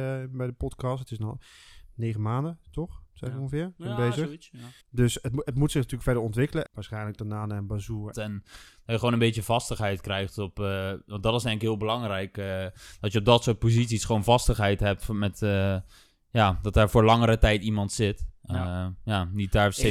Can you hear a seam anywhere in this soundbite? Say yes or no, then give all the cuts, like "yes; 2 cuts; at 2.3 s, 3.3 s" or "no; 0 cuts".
yes; 3 cuts; at 4.8 s, 6.7 s, 8.1 s